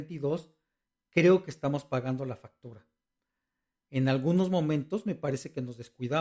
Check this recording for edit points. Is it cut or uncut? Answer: uncut